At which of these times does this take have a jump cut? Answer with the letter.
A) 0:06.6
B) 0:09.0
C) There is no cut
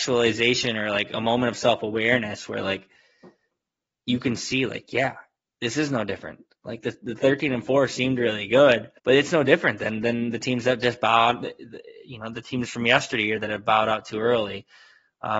B